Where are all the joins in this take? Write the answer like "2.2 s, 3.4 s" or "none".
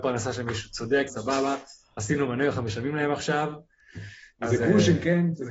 1.1 s